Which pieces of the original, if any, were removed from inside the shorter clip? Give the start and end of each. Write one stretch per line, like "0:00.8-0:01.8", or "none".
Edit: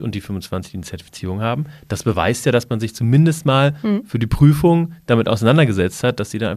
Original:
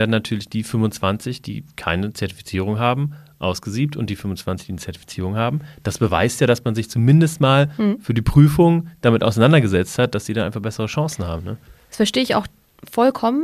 none

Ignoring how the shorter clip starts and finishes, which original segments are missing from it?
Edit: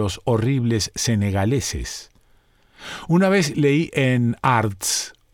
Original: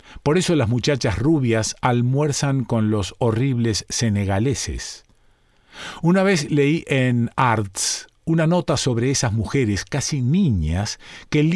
none

